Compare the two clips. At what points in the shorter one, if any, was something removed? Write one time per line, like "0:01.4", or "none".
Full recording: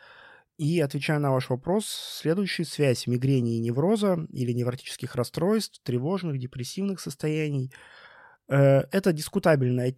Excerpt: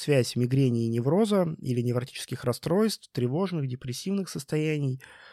none